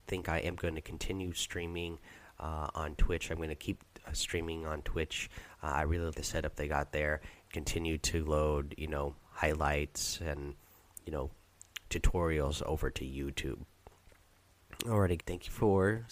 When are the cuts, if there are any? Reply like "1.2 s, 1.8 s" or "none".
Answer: 6.1 s, 7.4 s, 15.2 s